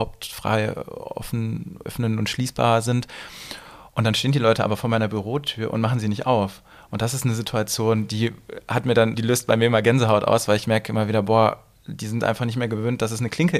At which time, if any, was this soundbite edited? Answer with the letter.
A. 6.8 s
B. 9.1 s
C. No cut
B